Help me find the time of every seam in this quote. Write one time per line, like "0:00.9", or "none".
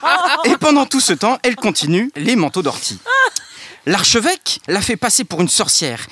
0:04.7